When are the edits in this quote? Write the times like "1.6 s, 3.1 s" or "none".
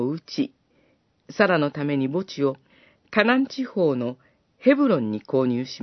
1.2 s